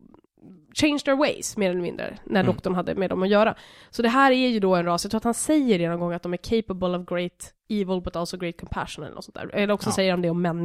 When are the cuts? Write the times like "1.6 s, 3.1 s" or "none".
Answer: none